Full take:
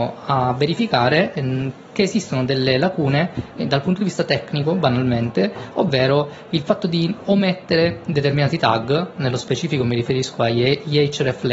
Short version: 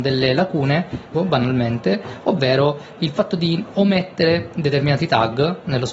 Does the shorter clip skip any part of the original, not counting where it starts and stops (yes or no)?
yes